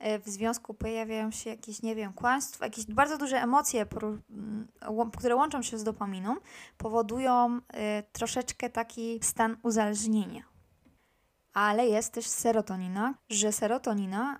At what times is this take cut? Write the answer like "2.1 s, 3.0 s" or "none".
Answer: 11.4 s, 13.2 s